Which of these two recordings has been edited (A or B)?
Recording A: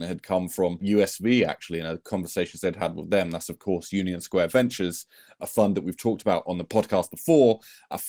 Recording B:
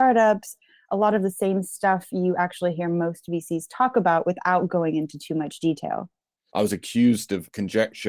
B